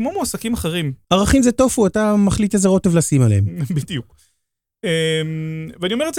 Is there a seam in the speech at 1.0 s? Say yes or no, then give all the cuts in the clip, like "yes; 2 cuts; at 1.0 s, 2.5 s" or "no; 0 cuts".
yes; 1 cut; at 1.0 s